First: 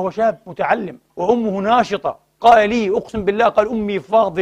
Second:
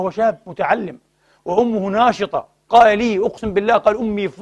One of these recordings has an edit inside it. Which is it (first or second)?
first